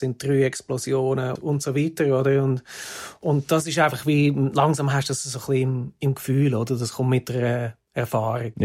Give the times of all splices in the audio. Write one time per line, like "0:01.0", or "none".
0:01.4